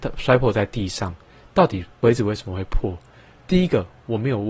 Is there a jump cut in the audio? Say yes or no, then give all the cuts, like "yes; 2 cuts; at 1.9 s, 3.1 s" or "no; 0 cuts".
no; 0 cuts